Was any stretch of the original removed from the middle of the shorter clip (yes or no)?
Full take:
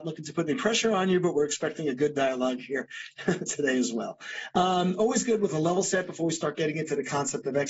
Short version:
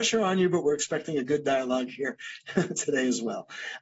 no